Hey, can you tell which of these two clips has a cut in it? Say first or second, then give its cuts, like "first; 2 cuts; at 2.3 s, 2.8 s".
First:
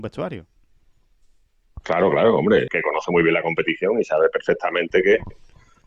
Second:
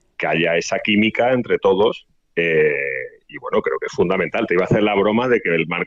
first; 1 cut; at 2.7 s